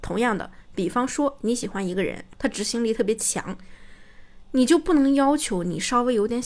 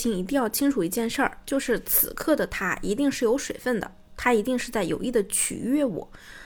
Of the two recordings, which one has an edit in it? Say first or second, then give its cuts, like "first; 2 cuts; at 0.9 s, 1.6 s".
first; 1 cut; at 2.3 s